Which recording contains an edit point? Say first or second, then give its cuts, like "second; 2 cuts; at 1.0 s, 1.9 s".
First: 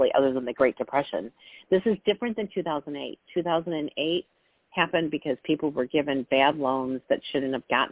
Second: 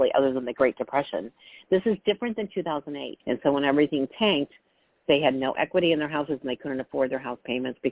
second; 1 cut; at 3.2 s